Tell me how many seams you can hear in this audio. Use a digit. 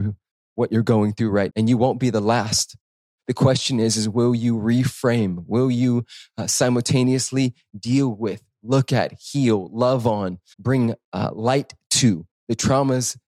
2